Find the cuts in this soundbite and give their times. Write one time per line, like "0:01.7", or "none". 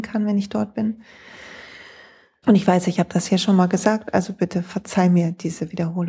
0:02.4